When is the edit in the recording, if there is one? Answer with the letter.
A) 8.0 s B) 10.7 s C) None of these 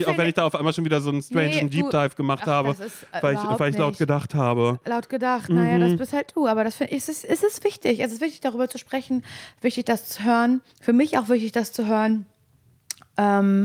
B